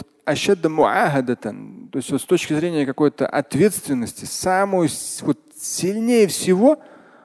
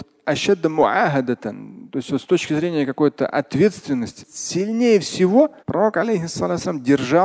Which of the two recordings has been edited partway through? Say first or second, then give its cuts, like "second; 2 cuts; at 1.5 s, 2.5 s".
second; 2 cuts; at 4.2 s, 5.6 s